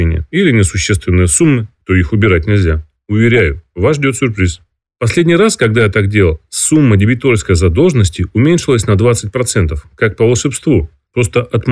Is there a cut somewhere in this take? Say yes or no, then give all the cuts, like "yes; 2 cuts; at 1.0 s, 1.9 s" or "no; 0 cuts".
yes; 1 cut; at 1.8 s